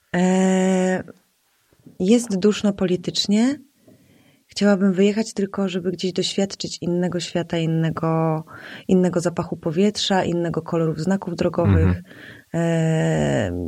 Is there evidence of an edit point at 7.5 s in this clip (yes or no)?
no